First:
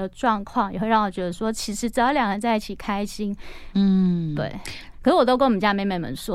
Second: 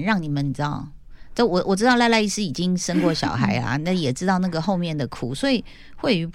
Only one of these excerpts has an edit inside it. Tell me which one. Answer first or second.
first